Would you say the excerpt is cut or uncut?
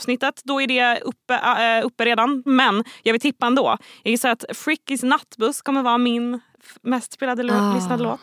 cut